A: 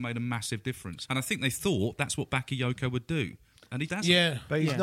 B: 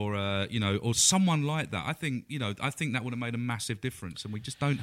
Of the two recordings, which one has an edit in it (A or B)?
A